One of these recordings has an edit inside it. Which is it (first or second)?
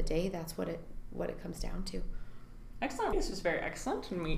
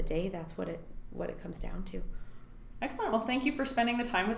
first